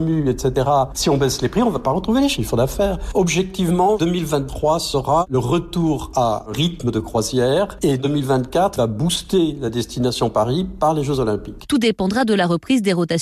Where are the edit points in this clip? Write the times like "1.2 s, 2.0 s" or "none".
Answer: 0.9 s, 11.7 s